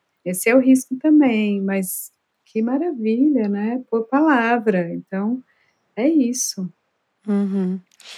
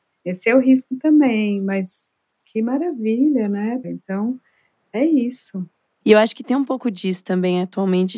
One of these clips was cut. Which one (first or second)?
second